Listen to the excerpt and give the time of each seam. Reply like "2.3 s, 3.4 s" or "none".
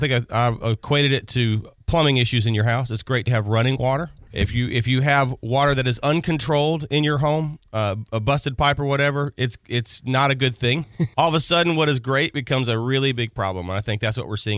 4.3 s, 11.1 s